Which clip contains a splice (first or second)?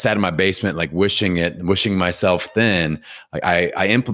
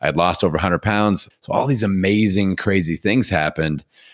second